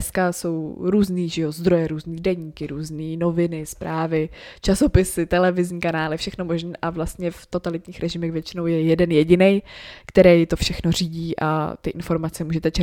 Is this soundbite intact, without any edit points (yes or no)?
yes